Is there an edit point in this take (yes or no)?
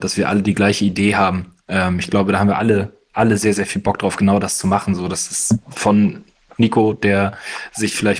no